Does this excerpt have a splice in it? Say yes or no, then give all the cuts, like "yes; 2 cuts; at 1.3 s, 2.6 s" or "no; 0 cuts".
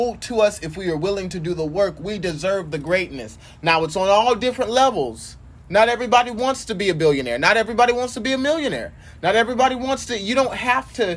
no; 0 cuts